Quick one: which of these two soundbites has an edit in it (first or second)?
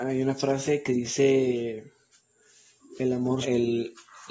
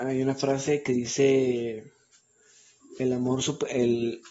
first